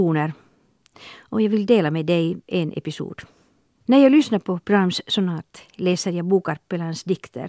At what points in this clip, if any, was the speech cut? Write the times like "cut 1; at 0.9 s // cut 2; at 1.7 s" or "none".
cut 1; at 3.8 s